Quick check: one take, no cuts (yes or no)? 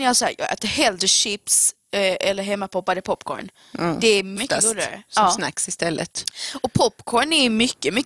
no